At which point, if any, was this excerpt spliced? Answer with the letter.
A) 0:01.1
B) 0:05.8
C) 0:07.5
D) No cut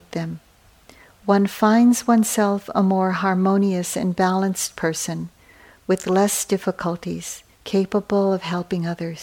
C